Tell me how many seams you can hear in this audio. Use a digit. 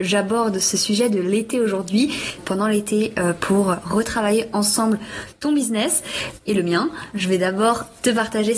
2